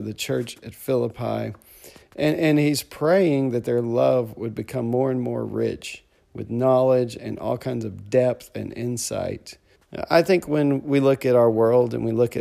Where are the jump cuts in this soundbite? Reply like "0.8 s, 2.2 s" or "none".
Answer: 9.8 s